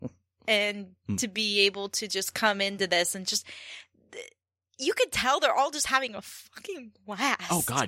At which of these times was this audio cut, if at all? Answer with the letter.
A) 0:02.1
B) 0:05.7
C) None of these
C